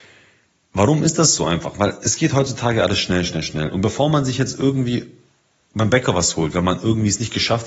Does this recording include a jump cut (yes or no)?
no